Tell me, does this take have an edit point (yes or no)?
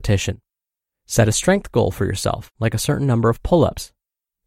no